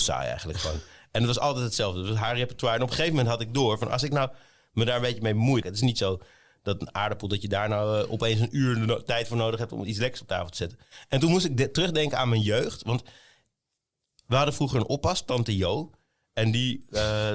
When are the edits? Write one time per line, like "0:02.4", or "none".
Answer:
0:05.6